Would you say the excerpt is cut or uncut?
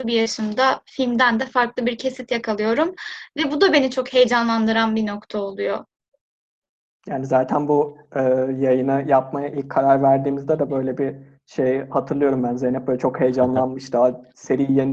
uncut